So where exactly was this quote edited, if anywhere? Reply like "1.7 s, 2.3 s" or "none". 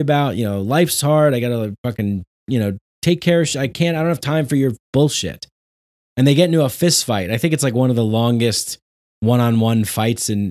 none